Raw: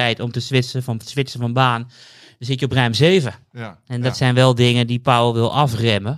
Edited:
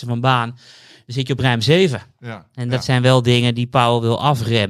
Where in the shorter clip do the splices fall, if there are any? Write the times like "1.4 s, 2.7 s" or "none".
none